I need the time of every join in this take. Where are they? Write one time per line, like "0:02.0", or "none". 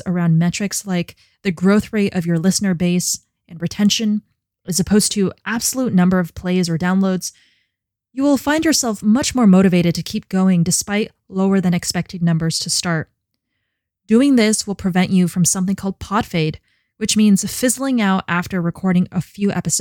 none